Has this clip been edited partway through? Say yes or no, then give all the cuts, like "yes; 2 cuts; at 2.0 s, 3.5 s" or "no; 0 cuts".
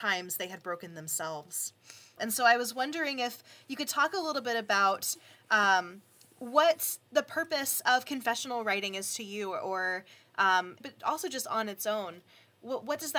yes; 2 cuts; at 2.2 s, 10.8 s